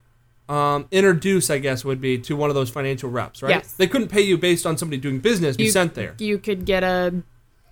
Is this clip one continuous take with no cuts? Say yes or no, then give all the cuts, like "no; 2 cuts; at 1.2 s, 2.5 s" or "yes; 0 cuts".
no; 1 cut; at 5.6 s